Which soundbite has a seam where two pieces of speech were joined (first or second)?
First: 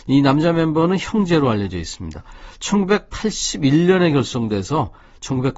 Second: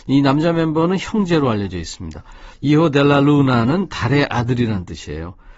second